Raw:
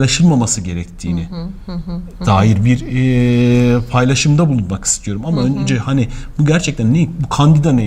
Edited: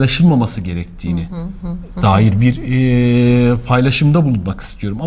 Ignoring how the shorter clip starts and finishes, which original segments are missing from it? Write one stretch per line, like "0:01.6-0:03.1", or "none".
0:01.6-0:01.8